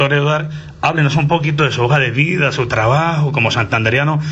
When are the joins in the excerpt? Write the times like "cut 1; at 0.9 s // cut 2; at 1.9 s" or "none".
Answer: none